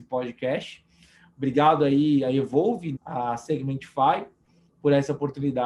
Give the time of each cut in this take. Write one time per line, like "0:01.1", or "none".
0:03.0